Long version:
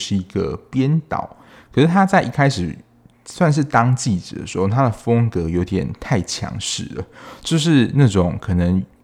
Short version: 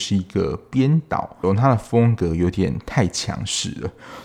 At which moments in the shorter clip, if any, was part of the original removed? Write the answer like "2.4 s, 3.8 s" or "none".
1.4 s